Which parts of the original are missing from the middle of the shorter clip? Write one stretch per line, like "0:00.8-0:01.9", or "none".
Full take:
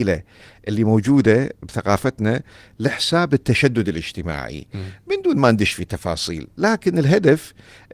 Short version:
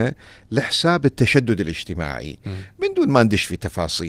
none